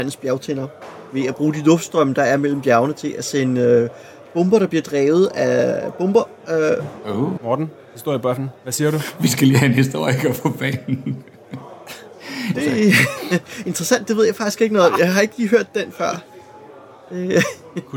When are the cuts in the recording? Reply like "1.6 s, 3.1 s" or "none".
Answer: 7.4 s, 12.5 s